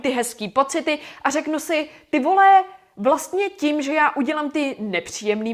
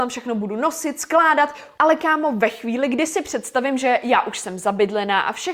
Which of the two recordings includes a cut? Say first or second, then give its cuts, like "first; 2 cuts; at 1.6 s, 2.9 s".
second; 1 cut; at 1.8 s